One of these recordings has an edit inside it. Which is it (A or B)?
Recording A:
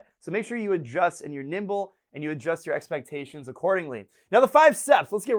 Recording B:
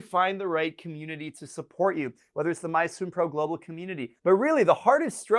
B